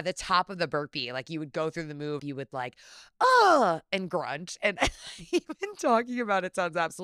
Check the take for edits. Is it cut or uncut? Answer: cut